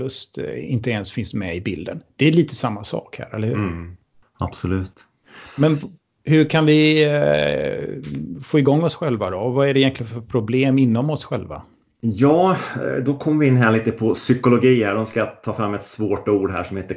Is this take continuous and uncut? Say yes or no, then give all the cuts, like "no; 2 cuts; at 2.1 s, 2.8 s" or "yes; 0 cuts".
yes; 0 cuts